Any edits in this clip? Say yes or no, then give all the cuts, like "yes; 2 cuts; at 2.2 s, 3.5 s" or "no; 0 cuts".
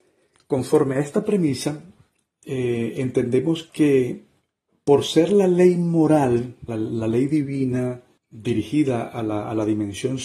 yes; 2 cuts; at 6.7 s, 8.2 s